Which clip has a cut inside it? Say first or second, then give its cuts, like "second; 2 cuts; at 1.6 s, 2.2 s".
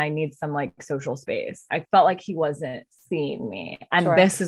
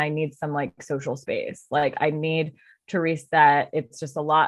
first; 1 cut; at 1.7 s